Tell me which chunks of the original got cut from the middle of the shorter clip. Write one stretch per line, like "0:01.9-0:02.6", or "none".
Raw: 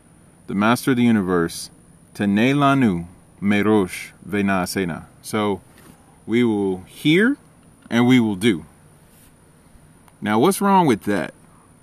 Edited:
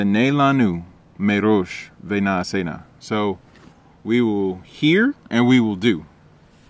0:07.5-0:07.8